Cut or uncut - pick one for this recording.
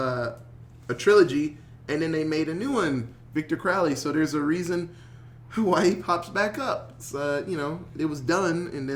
uncut